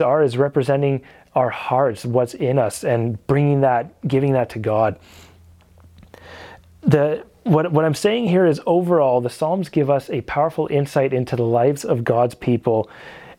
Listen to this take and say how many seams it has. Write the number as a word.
zero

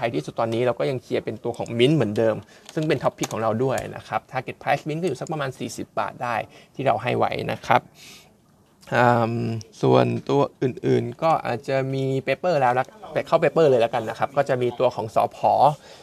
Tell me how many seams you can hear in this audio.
one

